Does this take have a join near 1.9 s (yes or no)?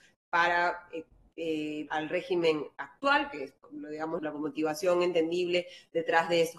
yes